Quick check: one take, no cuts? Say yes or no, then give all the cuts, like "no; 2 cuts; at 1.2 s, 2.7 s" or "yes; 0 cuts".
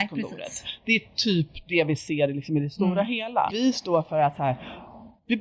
no; 1 cut; at 3.5 s